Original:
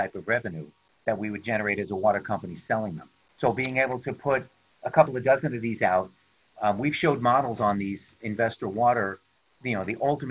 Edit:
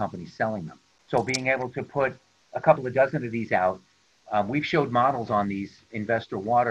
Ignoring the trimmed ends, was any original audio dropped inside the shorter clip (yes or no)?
no